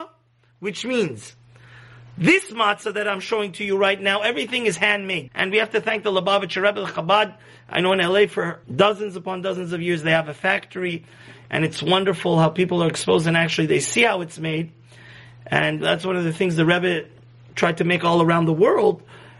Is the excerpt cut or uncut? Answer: cut